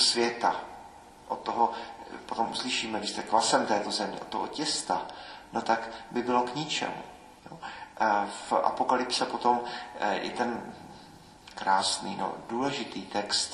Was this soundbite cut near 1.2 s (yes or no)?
no